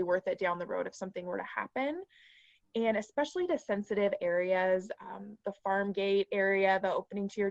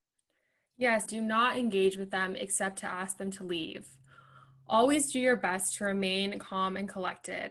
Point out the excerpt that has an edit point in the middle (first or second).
second